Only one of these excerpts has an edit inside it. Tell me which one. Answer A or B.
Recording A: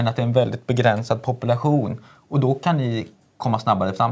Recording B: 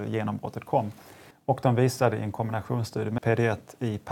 B